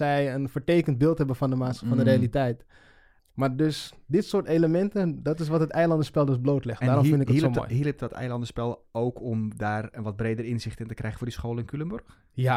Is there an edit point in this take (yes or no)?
yes